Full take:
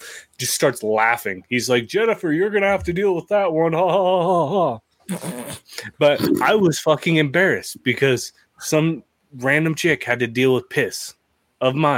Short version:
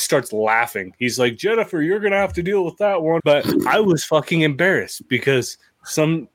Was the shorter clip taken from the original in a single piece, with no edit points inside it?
no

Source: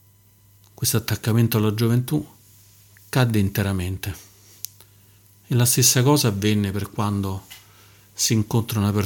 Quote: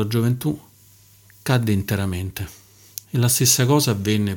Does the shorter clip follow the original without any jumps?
no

